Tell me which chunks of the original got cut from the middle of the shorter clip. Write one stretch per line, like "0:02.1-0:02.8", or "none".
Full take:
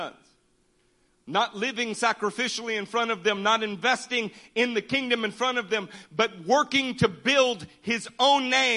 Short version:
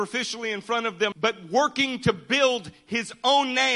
0:03.4-0:06.1